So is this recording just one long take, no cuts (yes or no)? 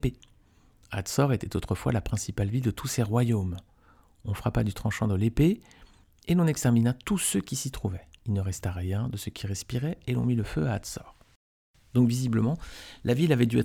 yes